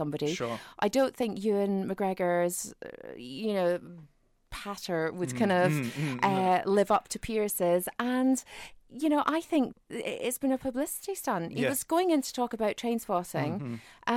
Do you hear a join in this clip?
yes; 1 cut; at 9.7 s

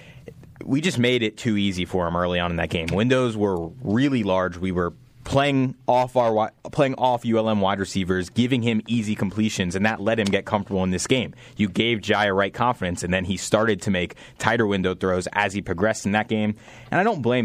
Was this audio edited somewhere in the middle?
no; 0 cuts

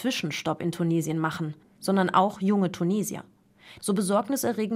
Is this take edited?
yes; 2 cuts; at 1.6 s, 3.8 s

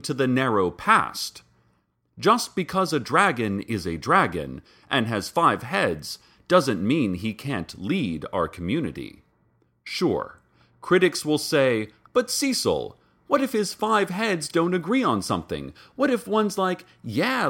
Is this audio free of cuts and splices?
no; 1 cut; at 12.1 s

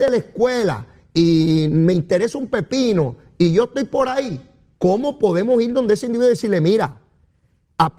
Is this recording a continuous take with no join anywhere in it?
yes; 0 cuts

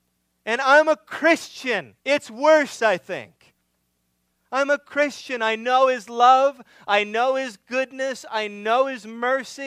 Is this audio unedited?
no; 1 cut; at 2.0 s

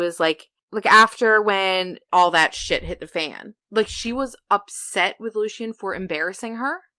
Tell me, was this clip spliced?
yes; 2 cuts; at 2.1 s, 3.6 s

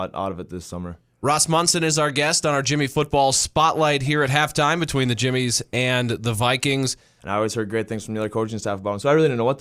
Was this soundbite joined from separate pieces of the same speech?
yes; 1 cut; at 7.2 s

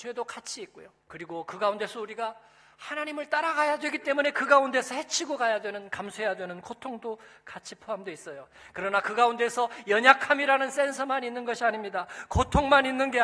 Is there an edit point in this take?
yes; 1 cut; at 1.0 s

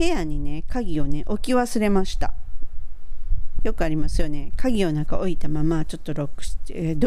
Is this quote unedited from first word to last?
no; 1 cut; at 3.6 s

